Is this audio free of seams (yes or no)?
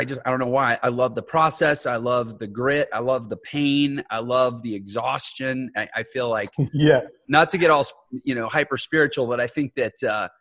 yes